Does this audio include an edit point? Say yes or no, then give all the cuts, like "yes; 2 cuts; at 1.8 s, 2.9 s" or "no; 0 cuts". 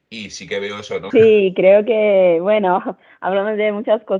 yes; 1 cut; at 1.1 s